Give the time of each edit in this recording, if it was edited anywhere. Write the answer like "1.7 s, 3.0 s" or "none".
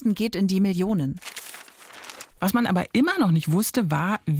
2.3 s